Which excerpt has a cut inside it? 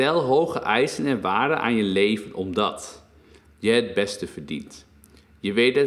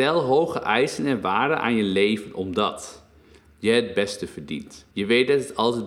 second; 1 cut; at 4.9 s

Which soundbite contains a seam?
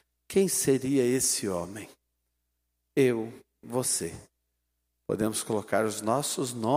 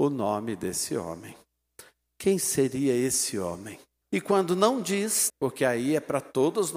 second; 2 cuts; at 4.0 s, 5.3 s

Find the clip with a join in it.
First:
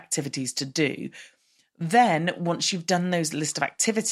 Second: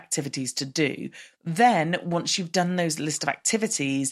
second; 1 cut; at 1.3 s

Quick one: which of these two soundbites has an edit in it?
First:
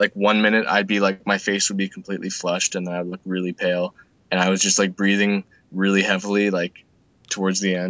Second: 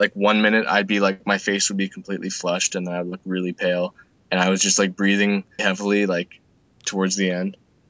second; 1 cut; at 5.6 s

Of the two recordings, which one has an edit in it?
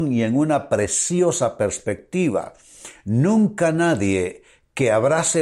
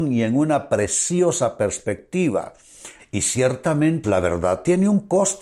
second; 2 cuts; at 3.0 s, 4.0 s

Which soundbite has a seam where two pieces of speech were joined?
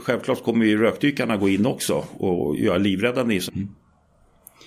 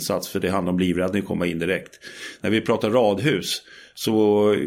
first; 1 cut; at 3.5 s

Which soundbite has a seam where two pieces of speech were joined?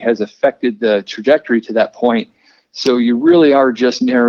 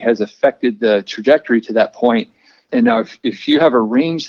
second; 1 cut; at 2.7 s

